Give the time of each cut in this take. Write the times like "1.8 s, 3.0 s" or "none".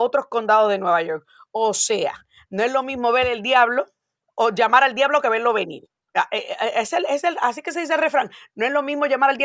none

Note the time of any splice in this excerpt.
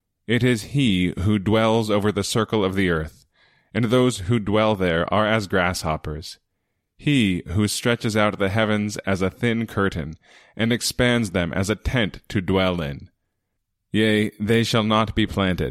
13.8 s

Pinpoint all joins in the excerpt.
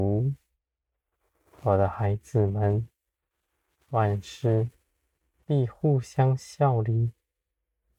none

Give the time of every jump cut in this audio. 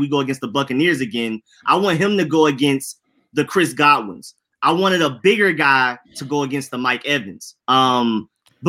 7.6 s

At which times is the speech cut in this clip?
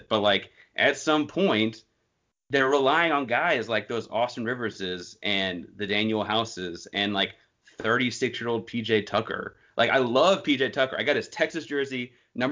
none

